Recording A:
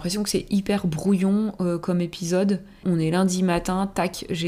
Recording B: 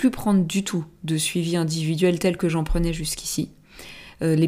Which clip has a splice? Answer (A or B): A